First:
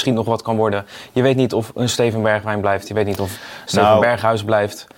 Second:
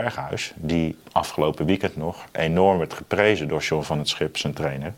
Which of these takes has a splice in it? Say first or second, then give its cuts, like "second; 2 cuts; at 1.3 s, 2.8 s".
second; 1 cut; at 1.0 s